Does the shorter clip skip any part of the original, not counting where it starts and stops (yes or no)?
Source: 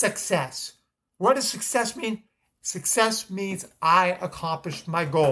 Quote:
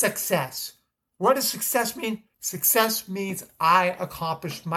yes